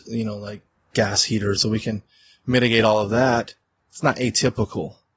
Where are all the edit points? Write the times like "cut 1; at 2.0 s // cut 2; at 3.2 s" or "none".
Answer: cut 1; at 1.6 s